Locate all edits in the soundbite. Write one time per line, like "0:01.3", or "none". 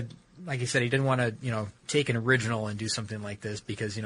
0:01.8